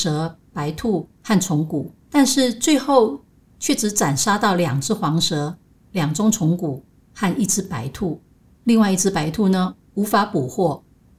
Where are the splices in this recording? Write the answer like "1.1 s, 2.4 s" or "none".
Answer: 2.0 s